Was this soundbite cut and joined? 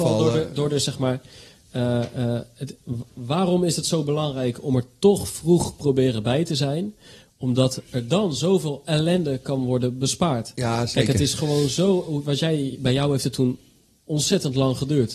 no; 0 cuts

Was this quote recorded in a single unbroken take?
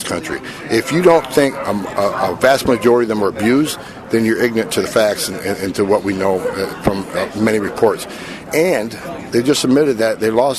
yes; 0 cuts

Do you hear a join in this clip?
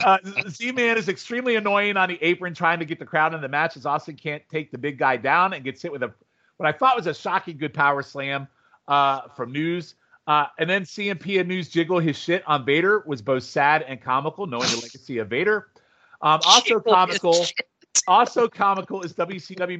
no; 0 cuts

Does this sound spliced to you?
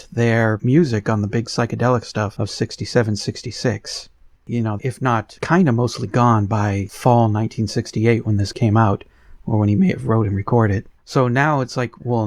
yes; 2 cuts; at 4.8 s, 11.0 s

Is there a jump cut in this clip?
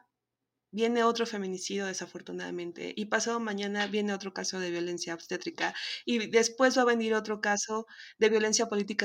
no; 0 cuts

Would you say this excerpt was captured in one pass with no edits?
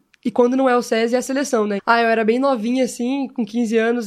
no; 1 cut; at 1.8 s

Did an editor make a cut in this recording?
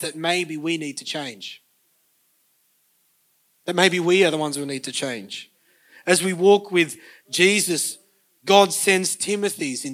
no; 0 cuts

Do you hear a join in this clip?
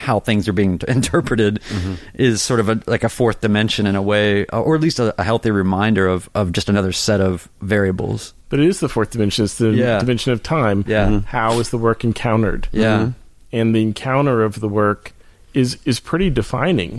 no; 0 cuts

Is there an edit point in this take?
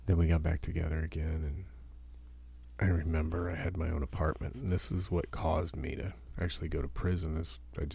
no; 0 cuts

